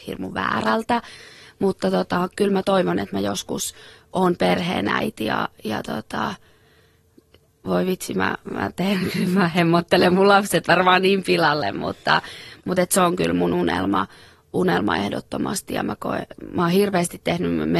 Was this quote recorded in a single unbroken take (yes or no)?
yes